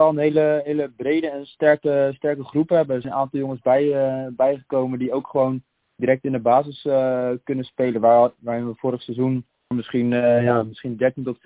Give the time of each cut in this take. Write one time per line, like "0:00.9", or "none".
0:09.7